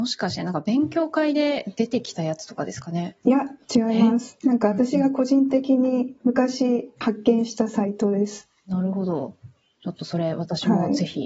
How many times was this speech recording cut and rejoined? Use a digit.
1